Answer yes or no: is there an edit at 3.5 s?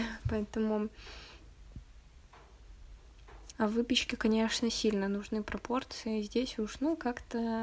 yes